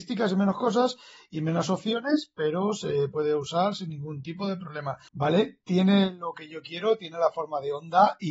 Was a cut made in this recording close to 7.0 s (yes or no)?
no